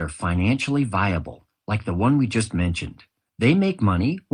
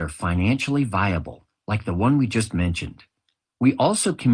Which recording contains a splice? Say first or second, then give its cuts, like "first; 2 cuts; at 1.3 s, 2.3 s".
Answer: first; 1 cut; at 3.2 s